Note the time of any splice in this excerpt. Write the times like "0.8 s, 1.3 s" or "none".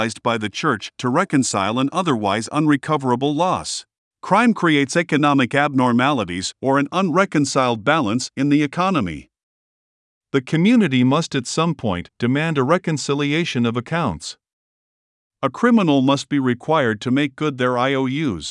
4.1 s

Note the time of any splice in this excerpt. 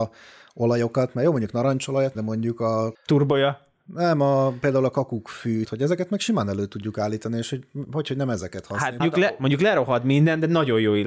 2.1 s, 5.6 s, 9.0 s

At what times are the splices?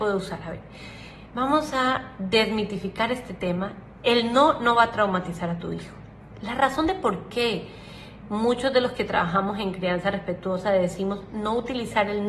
none

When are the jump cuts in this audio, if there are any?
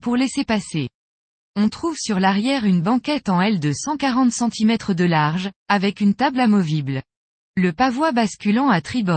7.5 s

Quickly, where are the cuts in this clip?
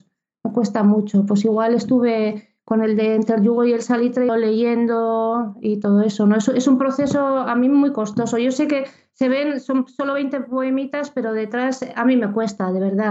4.3 s

